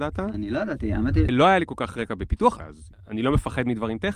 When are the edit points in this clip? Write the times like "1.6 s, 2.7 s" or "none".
1.3 s, 2.6 s